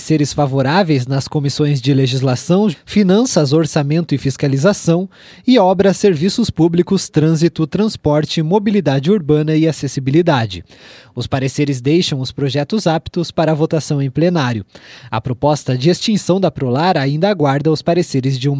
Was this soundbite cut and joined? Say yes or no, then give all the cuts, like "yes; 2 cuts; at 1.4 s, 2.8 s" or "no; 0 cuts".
yes; 1 cut; at 2.7 s